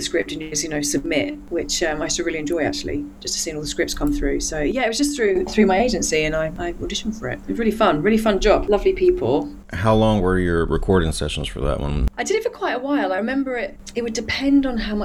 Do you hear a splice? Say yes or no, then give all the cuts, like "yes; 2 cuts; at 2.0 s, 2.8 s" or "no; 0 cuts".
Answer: no; 0 cuts